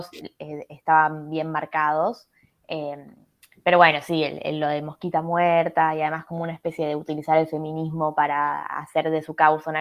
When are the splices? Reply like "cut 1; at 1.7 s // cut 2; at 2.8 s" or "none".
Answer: none